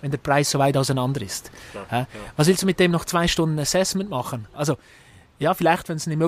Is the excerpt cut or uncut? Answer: cut